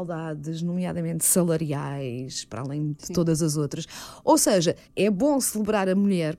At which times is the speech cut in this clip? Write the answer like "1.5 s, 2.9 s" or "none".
4.8 s